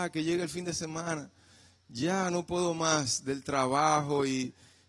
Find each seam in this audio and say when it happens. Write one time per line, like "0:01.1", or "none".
none